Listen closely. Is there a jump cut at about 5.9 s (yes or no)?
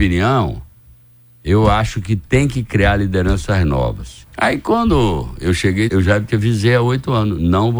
yes